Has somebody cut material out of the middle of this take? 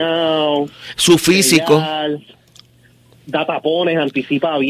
no; 0 cuts

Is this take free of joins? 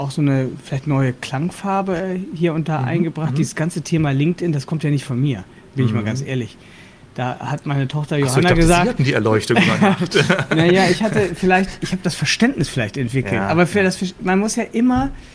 yes; 0 cuts

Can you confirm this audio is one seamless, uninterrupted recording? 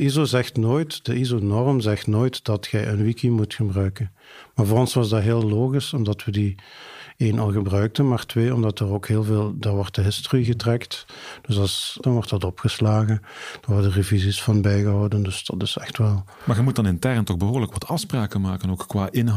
no; 1 cut; at 12.0 s

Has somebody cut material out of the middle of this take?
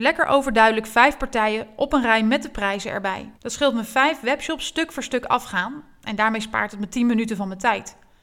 yes; 1 cut; at 3.3 s

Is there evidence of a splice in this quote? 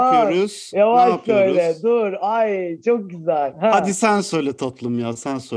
no; 0 cuts

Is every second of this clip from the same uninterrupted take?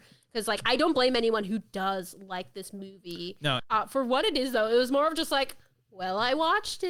no; 1 cut; at 3.6 s

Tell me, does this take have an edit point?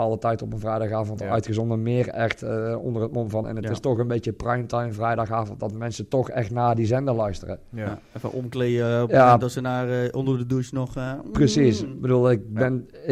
yes; 1 cut; at 3.4 s

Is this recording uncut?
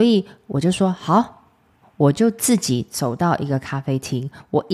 yes; 0 cuts

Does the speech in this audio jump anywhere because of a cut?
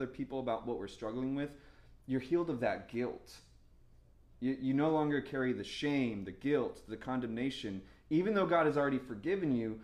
no; 0 cuts

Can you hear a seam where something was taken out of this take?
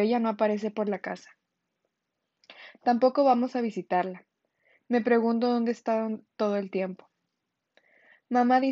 no; 0 cuts

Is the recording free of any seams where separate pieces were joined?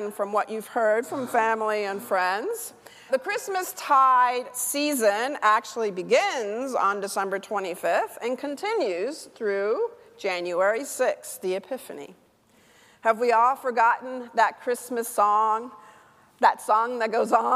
no; 1 cut; at 3.1 s

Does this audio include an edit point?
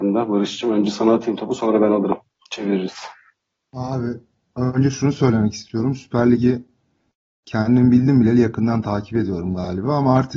no; 0 cuts

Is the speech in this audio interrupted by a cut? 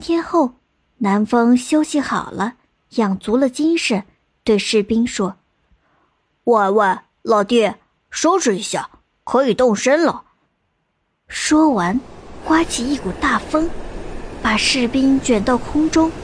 yes; 2 cuts; at 10.4 s, 12.4 s

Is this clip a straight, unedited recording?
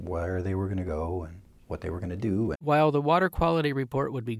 no; 1 cut; at 2.5 s

